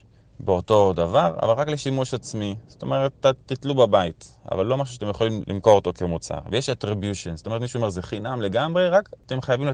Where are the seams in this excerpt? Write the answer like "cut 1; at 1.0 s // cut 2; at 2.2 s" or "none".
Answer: cut 1; at 5.4 s